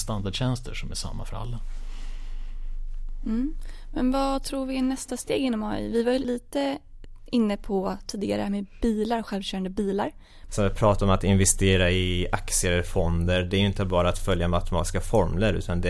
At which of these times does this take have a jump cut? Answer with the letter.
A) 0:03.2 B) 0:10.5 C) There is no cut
B